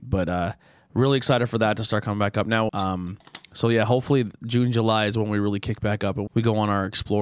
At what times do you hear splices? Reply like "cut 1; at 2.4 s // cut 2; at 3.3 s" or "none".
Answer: cut 1; at 2.7 s // cut 2; at 6.3 s